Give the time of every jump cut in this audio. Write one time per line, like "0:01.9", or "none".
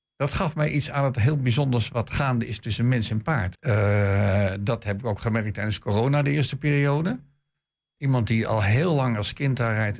0:03.6

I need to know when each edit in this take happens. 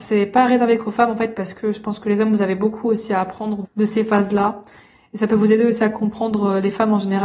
0:03.6

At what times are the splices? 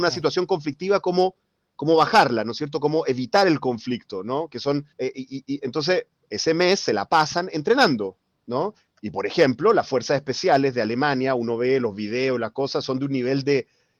0:04.9

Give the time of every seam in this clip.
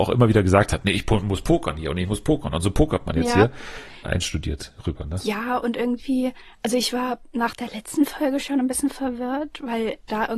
0:04.0

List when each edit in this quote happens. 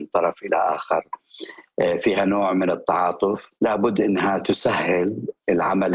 0:03.6

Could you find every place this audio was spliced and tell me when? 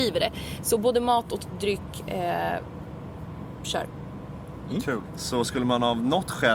0:05.1

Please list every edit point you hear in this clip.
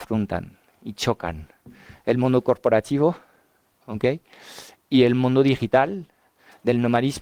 none

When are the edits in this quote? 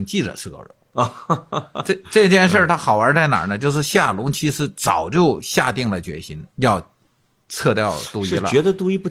0:06.5

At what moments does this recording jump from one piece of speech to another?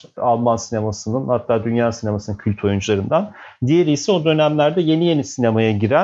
none

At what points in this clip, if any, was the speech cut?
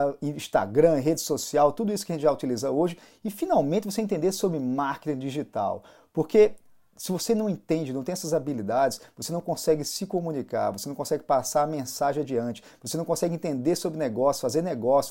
none

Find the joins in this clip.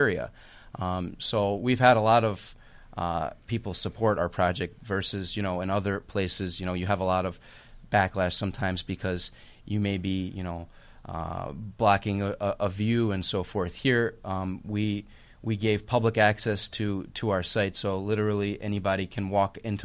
none

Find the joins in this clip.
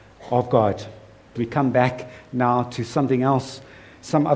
0:01.4

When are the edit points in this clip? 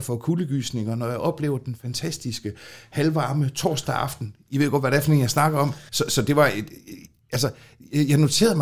0:05.9

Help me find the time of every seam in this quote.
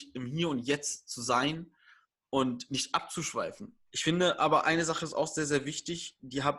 0:03.9

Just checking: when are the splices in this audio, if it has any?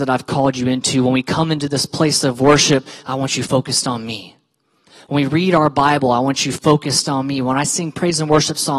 none

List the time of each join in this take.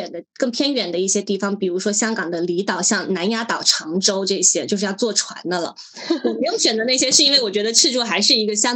none

